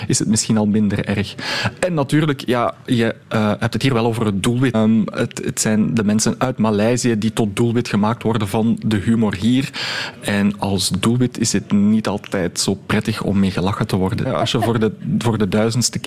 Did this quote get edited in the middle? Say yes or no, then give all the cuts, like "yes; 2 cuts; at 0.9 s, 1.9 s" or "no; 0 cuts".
yes; 2 cuts; at 4.7 s, 14.2 s